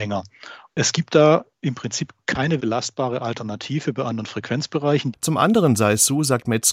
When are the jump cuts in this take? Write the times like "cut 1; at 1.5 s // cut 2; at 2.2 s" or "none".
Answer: cut 1; at 2.6 s // cut 2; at 5.1 s